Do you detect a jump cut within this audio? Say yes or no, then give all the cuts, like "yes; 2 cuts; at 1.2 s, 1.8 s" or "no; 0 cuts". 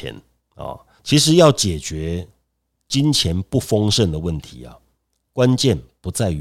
yes; 1 cut; at 1.0 s